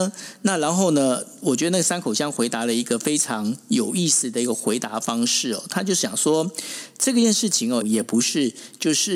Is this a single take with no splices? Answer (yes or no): no